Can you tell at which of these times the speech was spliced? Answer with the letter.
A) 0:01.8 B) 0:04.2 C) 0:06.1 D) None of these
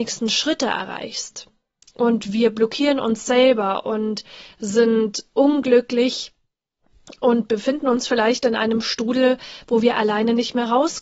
A